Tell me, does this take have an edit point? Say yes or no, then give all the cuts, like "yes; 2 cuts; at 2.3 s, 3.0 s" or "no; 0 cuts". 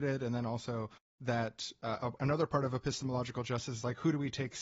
yes; 1 cut; at 2.2 s